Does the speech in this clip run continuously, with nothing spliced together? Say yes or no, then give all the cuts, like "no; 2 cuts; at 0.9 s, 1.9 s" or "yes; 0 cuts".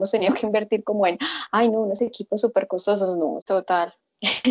no; 1 cut; at 3.4 s